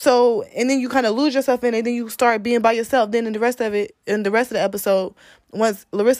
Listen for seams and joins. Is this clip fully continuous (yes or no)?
yes